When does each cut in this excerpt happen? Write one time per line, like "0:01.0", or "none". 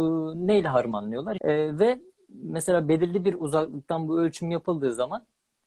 0:01.4